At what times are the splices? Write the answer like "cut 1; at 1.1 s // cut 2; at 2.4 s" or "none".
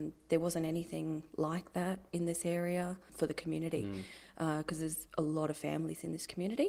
cut 1; at 3.1 s